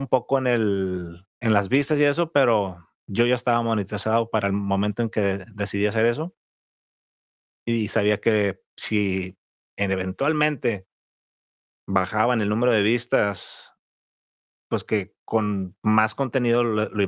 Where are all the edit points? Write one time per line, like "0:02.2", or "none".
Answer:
0:01.3